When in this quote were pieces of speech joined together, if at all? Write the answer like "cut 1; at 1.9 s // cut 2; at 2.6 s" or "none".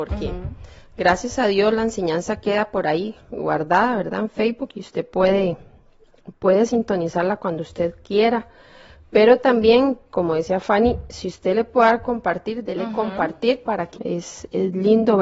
cut 1; at 13.9 s